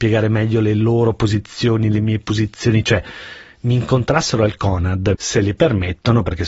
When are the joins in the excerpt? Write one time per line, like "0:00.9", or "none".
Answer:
0:05.1